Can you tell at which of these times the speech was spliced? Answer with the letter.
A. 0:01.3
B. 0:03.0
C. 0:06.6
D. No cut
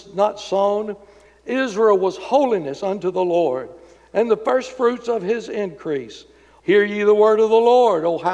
C